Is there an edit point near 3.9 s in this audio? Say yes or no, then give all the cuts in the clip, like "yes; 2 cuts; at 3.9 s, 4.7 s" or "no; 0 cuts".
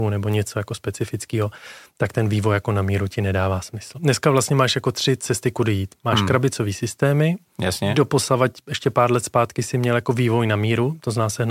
yes; 1 cut; at 3.9 s